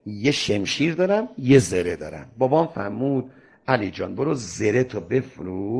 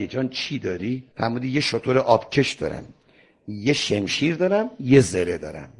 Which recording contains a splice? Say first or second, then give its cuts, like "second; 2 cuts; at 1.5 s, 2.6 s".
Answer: second; 1 cut; at 1.1 s